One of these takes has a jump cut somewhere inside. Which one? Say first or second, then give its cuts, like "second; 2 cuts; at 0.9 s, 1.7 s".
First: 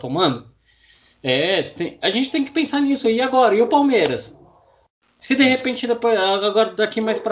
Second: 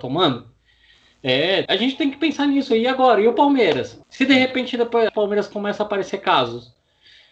second; 3 cuts; at 1.7 s, 4.0 s, 5.1 s